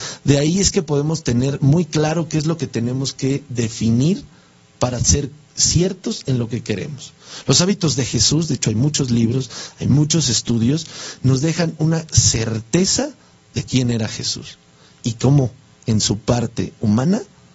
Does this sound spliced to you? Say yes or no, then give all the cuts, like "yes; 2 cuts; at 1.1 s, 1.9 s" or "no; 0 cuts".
no; 0 cuts